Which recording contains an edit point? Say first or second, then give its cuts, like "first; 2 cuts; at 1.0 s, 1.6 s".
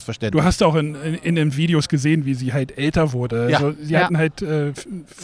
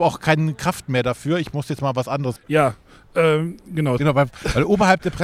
second; 2 cuts; at 2.4 s, 4.0 s